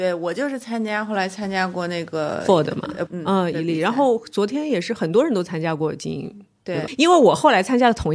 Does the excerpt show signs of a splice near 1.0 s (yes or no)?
no